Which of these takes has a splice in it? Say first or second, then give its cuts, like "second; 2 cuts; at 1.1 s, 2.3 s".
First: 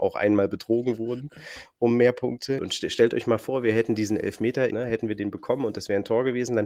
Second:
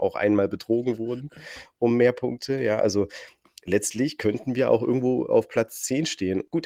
first; 2 cuts; at 2.6 s, 4.7 s